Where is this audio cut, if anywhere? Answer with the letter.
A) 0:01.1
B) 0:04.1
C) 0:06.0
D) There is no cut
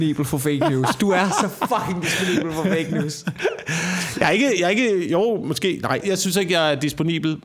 C